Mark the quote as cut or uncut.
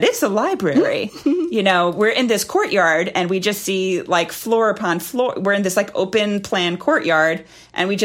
uncut